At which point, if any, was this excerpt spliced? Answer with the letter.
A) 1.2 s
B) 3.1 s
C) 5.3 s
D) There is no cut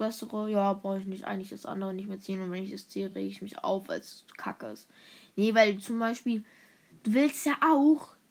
D